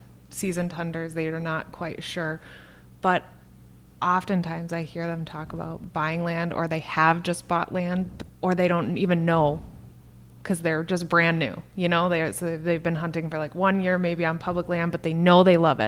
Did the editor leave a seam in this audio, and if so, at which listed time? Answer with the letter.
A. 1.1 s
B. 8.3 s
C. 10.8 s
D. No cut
B